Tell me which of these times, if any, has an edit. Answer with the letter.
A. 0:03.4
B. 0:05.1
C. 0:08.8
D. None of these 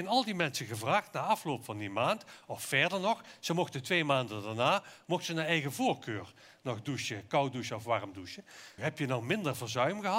C